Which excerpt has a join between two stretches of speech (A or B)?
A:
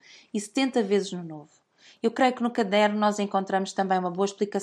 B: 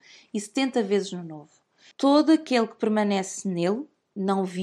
B